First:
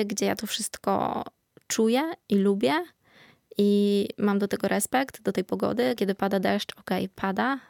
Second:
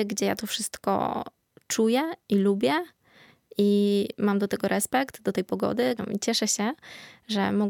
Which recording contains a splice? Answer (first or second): second